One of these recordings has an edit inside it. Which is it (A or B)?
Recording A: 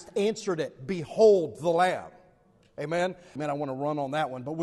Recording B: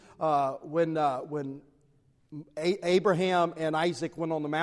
A